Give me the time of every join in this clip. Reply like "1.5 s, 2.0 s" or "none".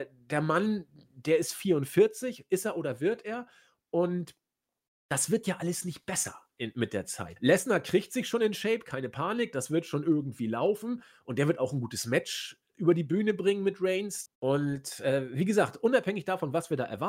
7.4 s, 14.3 s